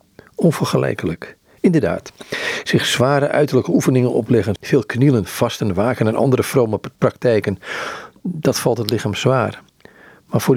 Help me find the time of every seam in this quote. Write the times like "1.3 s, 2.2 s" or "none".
4.6 s

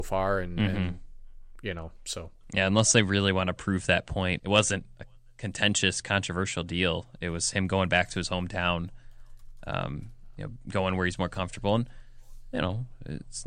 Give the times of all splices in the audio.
4.4 s

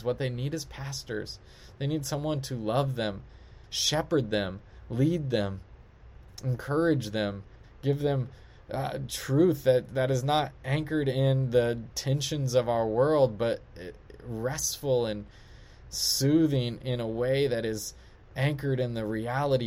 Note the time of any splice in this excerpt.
3.6 s, 7.6 s

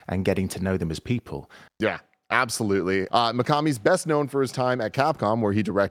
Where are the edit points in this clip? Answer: 1.7 s, 3.1 s

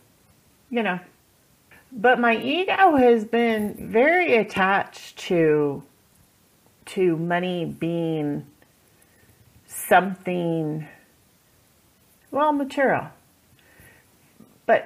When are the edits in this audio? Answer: 1.7 s

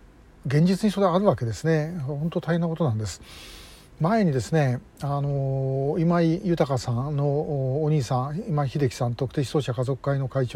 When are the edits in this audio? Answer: none

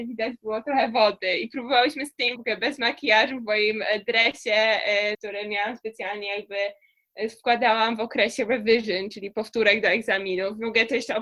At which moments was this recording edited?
2.4 s, 5.1 s

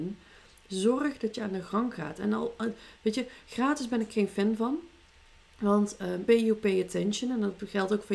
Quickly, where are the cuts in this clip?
6.3 s

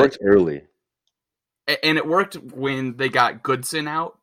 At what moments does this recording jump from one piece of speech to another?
none

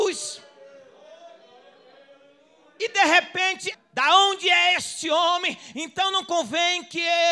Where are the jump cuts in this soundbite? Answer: 3.7 s, 5.7 s

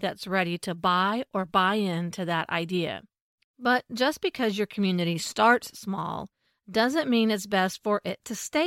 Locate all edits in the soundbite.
3.4 s

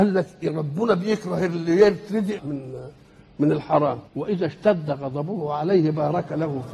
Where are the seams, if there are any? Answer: 2.4 s, 4.1 s

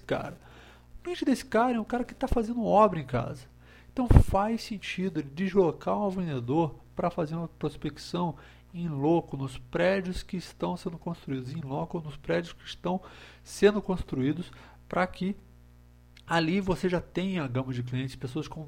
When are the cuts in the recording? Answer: none

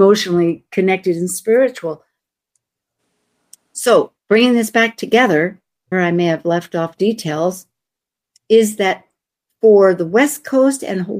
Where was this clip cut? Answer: 5.9 s

